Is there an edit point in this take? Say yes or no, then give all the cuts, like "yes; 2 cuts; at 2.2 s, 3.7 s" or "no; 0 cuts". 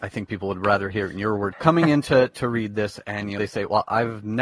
yes; 1 cut; at 1.5 s